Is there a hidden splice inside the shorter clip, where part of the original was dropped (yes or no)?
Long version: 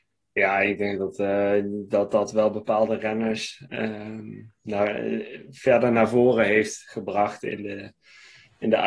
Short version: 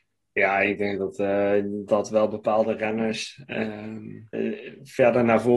yes